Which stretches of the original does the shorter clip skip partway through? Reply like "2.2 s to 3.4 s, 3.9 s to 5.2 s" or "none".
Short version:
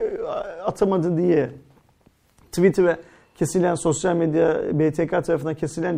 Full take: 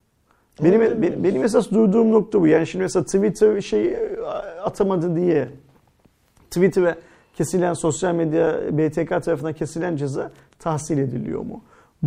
none